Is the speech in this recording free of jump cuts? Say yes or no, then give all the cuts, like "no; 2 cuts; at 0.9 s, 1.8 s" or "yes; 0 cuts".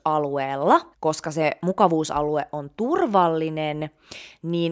no; 1 cut; at 0.9 s